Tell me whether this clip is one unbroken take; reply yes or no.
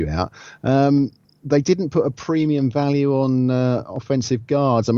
yes